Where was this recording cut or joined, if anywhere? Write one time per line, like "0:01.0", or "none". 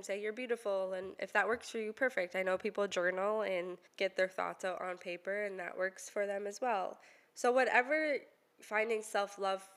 0:03.9